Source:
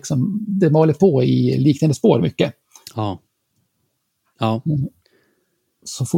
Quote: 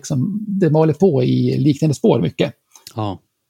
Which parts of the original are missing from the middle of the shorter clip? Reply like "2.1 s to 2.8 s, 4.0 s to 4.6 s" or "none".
none